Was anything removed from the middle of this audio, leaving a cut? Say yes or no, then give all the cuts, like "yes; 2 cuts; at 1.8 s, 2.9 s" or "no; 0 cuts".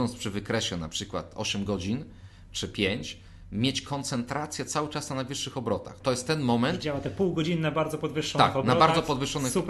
yes; 1 cut; at 6.0 s